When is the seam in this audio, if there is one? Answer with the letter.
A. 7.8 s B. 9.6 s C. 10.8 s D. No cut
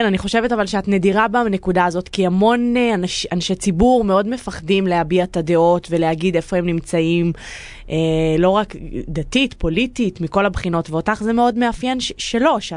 D